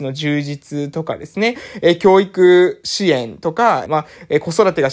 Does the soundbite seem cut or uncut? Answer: cut